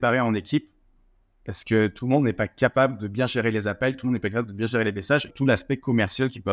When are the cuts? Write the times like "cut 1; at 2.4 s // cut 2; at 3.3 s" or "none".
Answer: cut 1; at 5.3 s